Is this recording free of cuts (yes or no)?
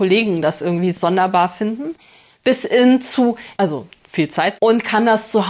no